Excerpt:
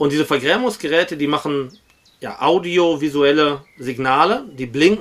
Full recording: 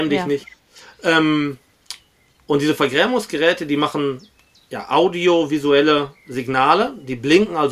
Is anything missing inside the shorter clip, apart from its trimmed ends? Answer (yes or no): no